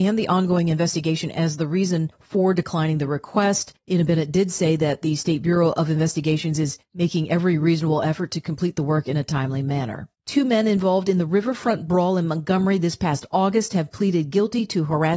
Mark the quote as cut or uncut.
cut